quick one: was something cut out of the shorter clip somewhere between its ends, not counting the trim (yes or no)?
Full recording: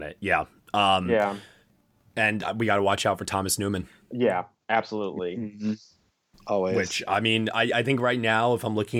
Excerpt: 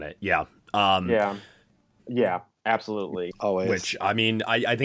yes